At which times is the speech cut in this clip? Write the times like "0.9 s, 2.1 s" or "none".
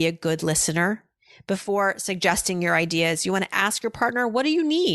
none